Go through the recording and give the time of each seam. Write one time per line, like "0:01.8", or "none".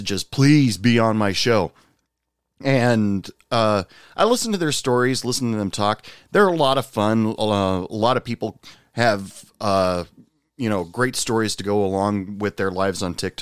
none